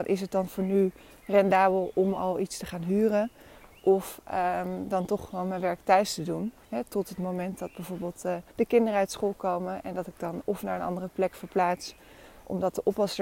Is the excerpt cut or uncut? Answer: cut